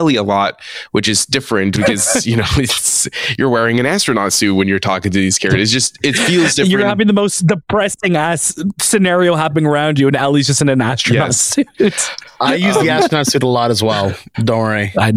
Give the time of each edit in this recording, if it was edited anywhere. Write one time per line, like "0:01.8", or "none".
none